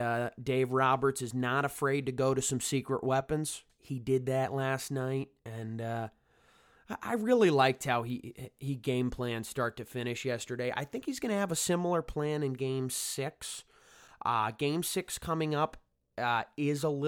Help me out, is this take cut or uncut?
uncut